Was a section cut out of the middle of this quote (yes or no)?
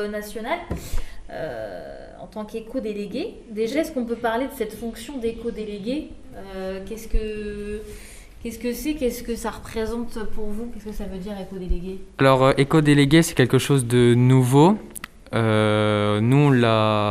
no